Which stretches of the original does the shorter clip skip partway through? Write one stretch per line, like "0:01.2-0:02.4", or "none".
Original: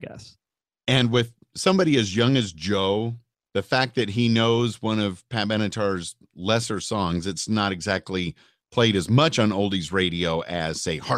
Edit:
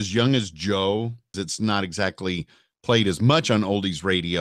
0:03.4-0:07.2